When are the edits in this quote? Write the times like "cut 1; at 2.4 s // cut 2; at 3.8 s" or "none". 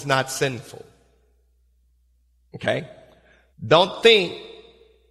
cut 1; at 3.5 s